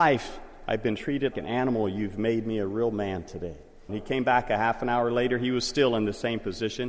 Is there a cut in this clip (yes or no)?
yes